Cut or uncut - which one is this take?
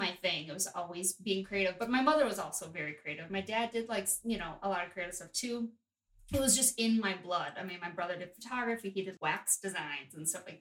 cut